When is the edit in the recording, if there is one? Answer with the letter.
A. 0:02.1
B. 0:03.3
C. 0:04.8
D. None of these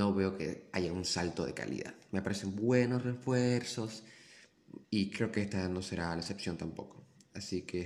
C